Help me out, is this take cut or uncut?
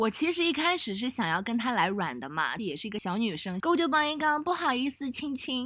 cut